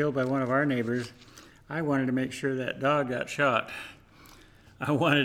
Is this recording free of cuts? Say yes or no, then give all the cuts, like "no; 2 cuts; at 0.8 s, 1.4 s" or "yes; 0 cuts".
yes; 0 cuts